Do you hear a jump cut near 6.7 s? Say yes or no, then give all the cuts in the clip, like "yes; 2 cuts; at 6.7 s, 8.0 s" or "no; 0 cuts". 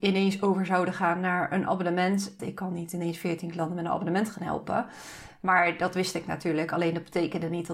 no; 1 cut; at 2.4 s